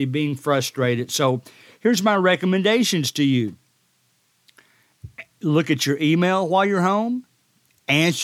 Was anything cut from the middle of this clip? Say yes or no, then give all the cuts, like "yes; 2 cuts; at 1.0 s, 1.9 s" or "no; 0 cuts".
no; 0 cuts